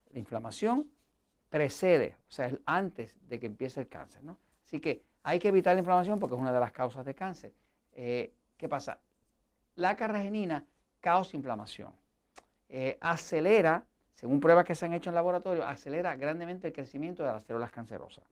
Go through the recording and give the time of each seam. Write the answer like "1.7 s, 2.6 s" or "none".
none

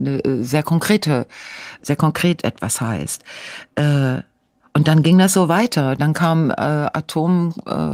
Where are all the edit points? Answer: 1.8 s

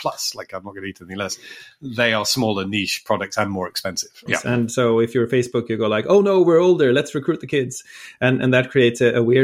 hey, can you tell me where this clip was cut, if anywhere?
4.3 s

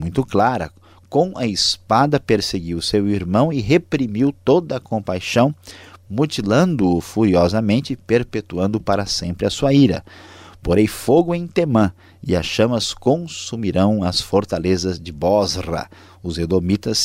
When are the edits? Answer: none

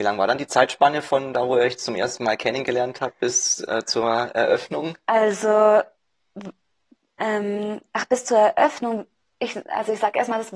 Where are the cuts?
none

